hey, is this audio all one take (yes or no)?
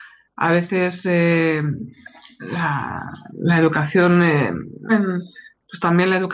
no